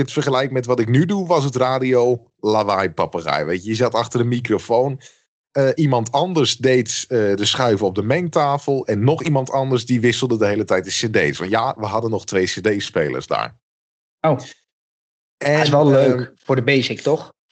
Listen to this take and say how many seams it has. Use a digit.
0